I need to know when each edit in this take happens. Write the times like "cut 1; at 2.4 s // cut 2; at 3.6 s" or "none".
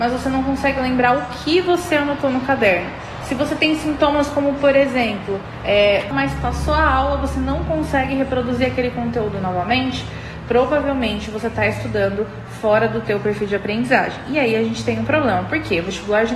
cut 1; at 6.1 s